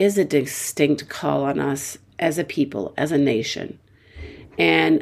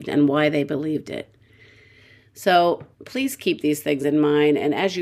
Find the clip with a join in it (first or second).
second